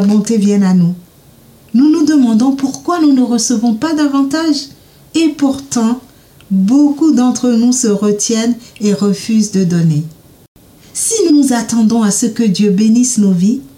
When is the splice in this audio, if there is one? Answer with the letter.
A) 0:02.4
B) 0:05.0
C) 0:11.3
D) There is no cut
C